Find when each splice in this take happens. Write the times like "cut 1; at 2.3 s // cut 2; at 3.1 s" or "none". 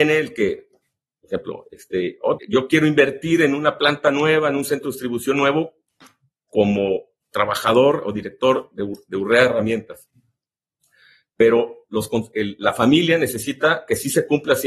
cut 1; at 2.4 s